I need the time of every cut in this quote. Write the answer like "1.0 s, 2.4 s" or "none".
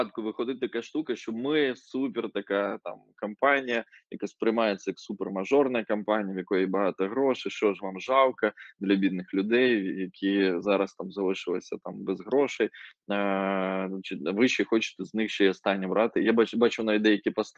none